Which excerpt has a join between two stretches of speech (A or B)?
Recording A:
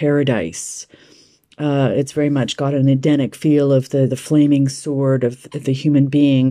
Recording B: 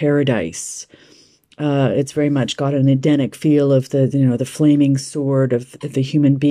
A